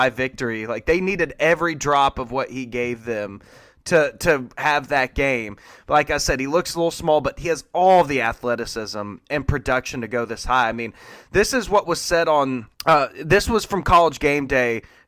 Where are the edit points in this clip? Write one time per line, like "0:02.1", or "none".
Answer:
0:12.7